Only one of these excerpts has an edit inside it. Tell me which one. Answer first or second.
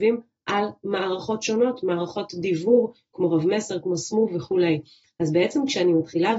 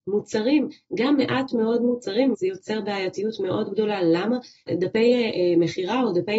second